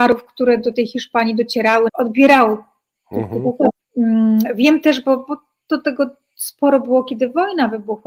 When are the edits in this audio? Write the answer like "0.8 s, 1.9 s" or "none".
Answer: 1.9 s, 3.8 s